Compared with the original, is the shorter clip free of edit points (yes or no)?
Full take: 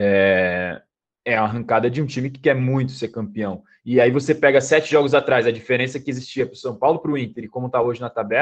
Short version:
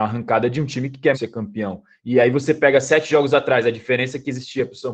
no